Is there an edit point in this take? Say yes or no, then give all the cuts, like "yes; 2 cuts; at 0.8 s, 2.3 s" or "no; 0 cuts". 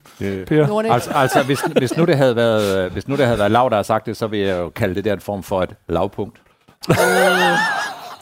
no; 0 cuts